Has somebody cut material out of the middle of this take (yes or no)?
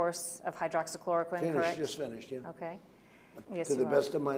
yes